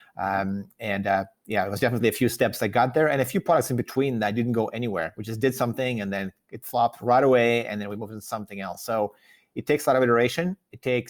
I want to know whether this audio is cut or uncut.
uncut